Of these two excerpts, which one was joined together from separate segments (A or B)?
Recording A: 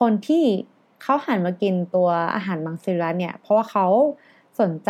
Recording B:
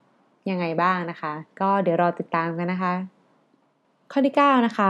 B